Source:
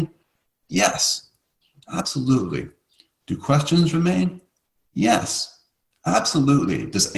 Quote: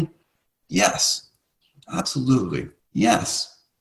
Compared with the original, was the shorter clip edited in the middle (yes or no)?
yes